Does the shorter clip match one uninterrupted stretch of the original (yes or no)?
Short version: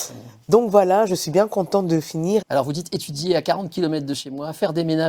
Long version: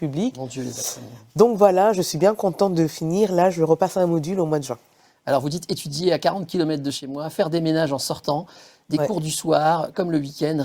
no